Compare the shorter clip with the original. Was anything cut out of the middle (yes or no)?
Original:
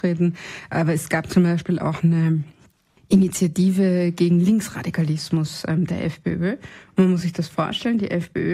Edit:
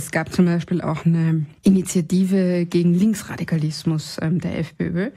yes